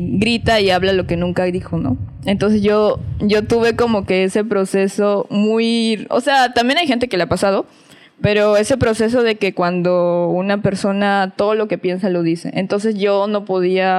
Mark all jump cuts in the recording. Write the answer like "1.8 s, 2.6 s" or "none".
none